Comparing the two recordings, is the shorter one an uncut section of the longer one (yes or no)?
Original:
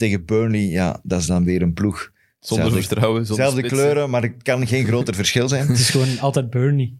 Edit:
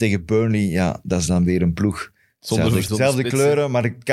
no